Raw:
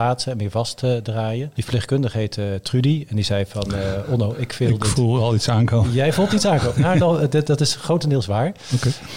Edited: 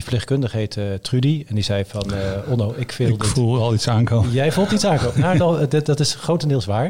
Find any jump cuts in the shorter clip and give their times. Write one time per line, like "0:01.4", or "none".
none